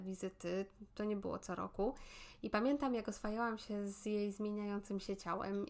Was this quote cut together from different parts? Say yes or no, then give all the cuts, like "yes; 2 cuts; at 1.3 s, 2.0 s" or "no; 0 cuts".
no; 0 cuts